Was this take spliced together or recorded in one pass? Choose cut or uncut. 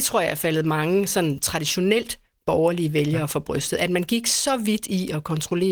uncut